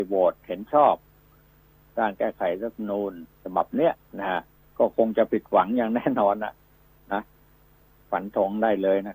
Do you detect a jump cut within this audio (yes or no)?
yes